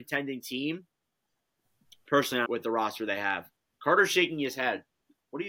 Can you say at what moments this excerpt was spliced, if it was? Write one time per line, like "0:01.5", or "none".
0:02.5